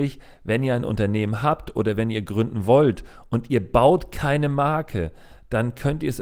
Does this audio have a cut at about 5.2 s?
no; 0 cuts

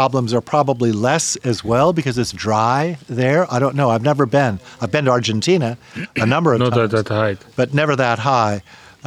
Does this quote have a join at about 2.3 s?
yes; 1 cut; at 2.3 s

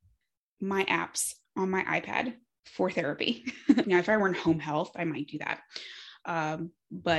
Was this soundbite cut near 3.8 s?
yes; 1 cut; at 3.8 s

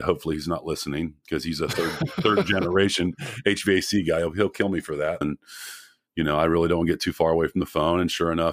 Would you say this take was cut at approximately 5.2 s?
yes; 1 cut; at 5.2 s

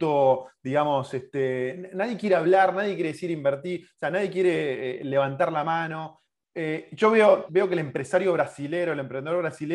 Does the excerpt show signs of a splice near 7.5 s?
yes; 1 cut; at 7.5 s

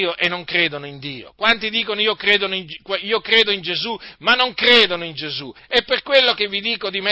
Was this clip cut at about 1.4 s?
no; 1 cut; at 5.6 s

